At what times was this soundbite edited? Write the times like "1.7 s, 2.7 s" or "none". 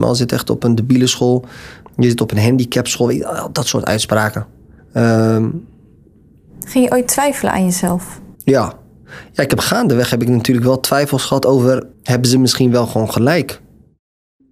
4.8 s, 8.3 s, 11.9 s